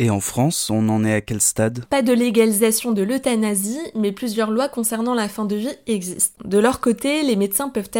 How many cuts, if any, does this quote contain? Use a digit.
2